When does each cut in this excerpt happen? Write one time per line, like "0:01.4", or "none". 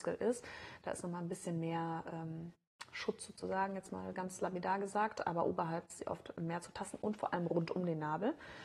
none